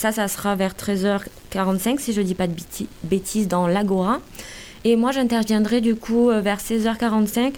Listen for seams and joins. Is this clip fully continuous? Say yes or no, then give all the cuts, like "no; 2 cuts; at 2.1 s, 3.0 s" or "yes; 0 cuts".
yes; 0 cuts